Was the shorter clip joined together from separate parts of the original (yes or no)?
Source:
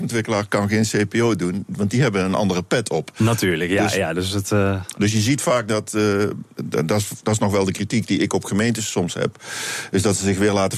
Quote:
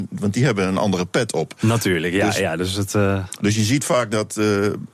no